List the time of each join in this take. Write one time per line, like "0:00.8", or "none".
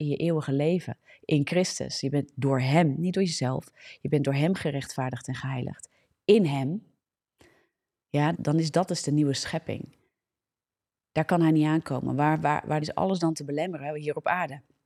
0:08.3
0:12.8